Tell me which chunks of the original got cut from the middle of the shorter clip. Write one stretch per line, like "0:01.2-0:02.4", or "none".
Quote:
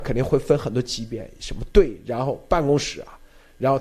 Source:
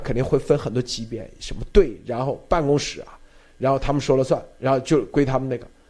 none

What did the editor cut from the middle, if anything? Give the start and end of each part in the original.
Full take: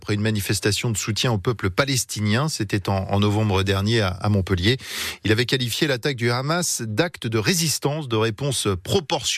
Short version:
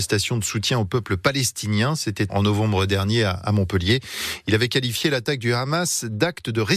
0:02.8-0:03.1

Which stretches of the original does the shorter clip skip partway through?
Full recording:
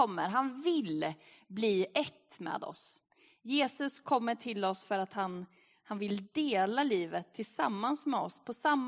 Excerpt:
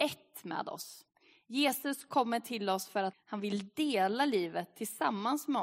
0:05.1-0:05.7

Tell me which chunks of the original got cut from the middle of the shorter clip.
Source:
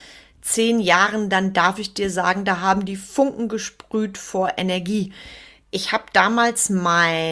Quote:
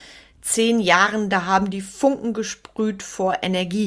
0:01.3-0:02.4

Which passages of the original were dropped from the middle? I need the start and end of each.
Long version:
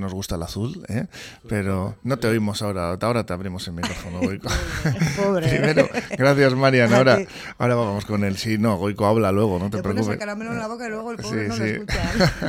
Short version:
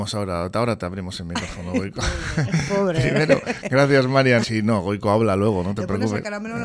0:06.9-0:08.4

